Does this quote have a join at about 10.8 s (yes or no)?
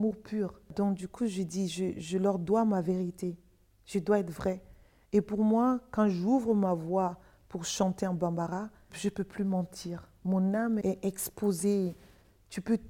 yes